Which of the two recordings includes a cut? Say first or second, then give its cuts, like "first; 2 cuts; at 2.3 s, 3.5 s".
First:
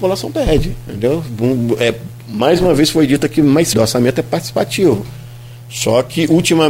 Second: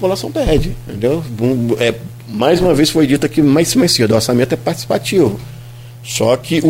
first; 1 cut; at 3.7 s